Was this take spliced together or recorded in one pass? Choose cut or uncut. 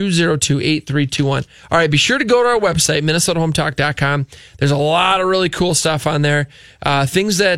uncut